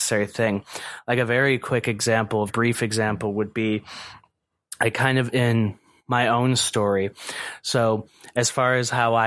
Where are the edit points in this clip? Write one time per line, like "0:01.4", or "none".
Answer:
0:02.5